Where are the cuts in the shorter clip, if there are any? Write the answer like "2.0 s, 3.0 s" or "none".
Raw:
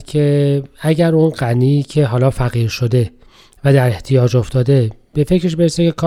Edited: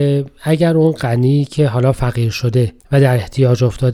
2.8 s